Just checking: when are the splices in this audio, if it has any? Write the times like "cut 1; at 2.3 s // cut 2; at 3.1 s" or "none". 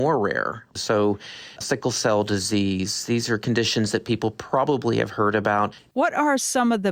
cut 1; at 1.6 s // cut 2; at 5.9 s